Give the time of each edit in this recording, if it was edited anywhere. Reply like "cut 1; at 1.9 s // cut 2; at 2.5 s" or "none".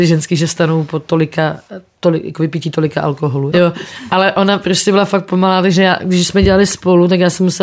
cut 1; at 3.5 s